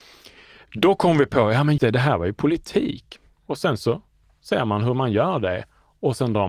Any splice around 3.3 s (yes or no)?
yes